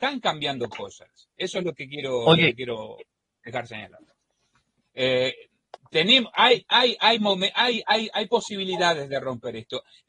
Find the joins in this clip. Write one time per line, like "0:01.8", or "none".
0:04.8

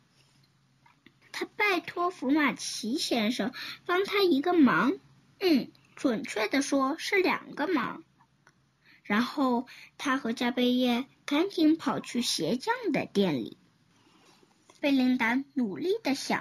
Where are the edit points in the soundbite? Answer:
0:14.8

